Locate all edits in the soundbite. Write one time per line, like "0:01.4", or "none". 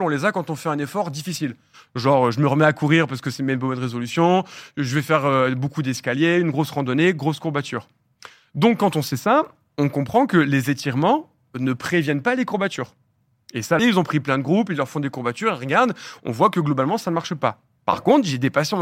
0:13.8